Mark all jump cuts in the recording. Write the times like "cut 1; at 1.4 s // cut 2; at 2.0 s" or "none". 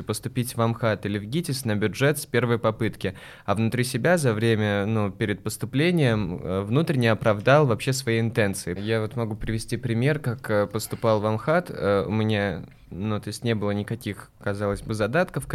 cut 1; at 8.8 s

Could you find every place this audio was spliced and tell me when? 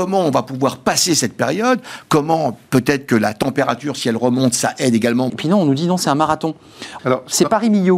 cut 1; at 5.3 s // cut 2; at 7.0 s

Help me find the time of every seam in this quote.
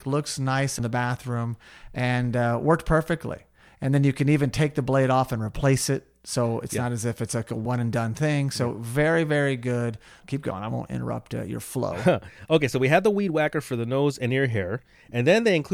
cut 1; at 10.2 s

